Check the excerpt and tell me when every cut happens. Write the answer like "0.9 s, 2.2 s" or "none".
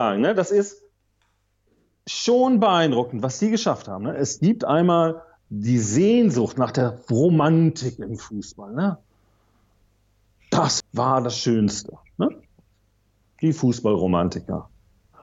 10.8 s

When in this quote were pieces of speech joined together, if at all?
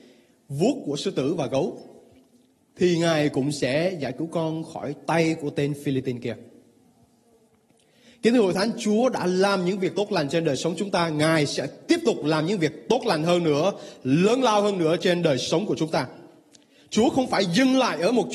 none

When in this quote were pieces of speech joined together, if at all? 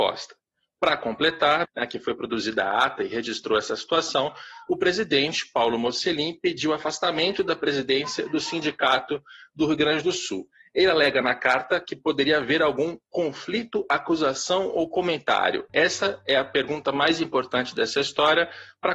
1.6 s, 15.7 s

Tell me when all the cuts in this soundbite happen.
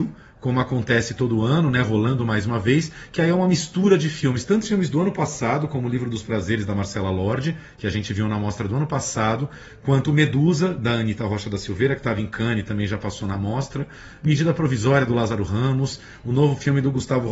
none

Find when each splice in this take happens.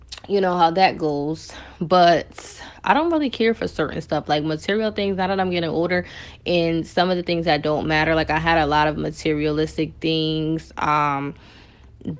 none

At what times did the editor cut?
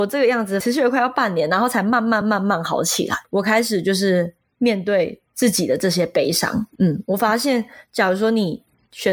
none

